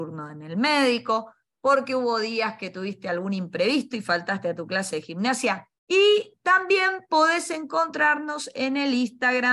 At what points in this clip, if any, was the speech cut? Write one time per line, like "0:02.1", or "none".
0:05.8